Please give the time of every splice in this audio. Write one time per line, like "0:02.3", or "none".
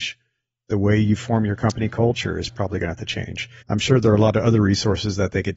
0:03.6